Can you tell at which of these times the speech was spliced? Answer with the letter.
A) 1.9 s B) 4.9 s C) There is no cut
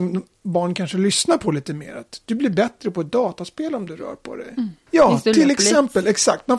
B